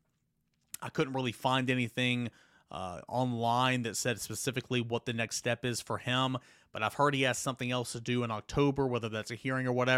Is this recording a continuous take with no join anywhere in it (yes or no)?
yes